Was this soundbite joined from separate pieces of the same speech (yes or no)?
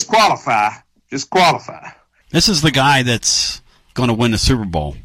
yes